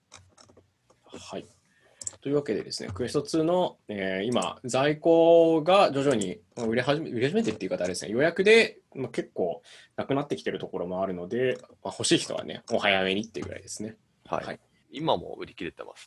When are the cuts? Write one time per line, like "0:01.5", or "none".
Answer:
0:02.2
0:14.8